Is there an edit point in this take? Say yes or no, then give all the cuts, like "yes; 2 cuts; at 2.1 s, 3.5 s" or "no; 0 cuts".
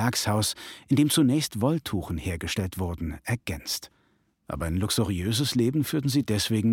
yes; 1 cut; at 4.3 s